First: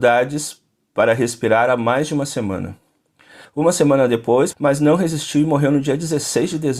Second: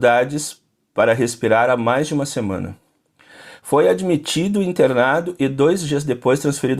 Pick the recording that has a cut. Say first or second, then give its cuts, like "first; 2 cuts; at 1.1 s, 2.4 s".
first; 2 cuts; at 3.4 s, 4.5 s